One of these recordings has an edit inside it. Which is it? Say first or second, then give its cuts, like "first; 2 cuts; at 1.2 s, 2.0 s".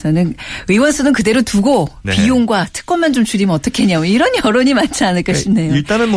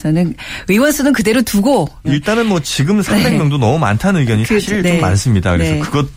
second; 1 cut; at 2.0 s